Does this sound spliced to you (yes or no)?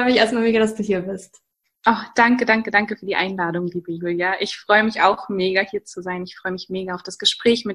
no